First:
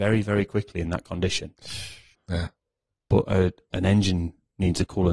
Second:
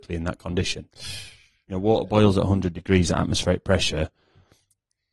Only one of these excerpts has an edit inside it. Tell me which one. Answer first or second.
first